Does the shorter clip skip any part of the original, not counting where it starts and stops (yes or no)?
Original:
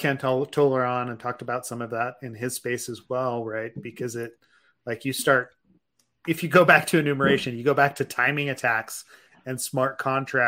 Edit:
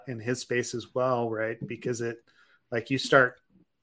no